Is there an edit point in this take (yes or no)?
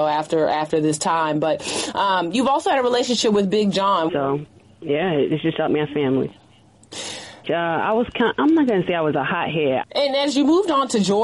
yes